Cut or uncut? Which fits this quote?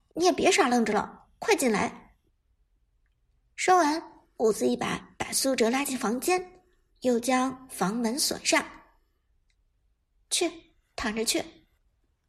uncut